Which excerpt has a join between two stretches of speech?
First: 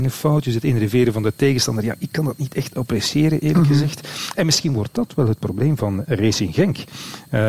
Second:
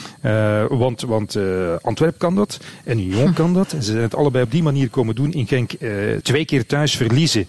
second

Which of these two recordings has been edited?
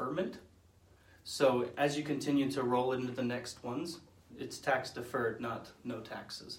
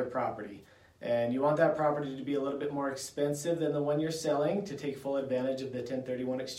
first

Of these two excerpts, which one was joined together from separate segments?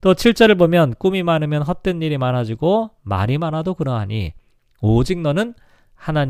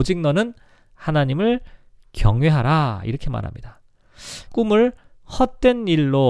second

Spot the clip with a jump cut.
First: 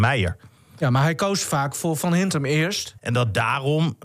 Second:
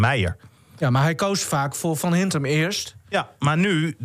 first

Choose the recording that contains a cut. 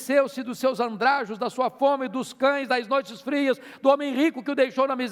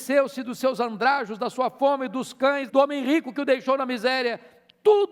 second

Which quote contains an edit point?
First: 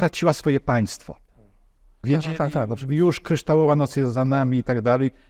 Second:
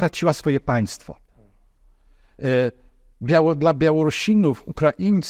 first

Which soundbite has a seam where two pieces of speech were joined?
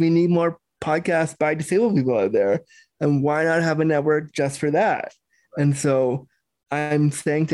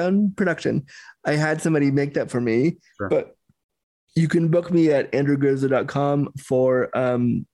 second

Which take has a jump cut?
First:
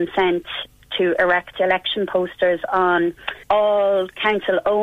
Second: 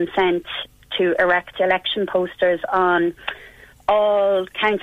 first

